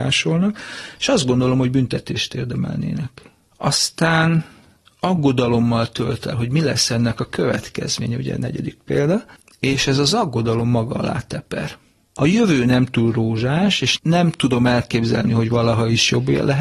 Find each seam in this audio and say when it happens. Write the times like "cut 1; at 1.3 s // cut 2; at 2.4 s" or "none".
cut 1; at 3.5 s